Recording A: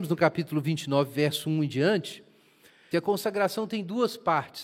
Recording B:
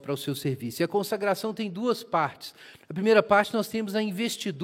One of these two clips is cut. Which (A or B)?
A